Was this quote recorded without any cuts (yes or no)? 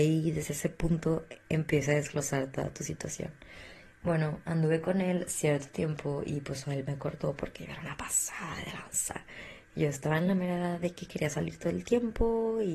yes